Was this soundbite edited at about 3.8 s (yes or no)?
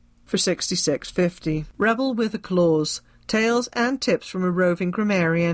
no